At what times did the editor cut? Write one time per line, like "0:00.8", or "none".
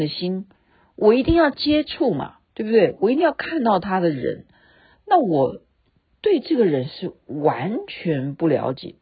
none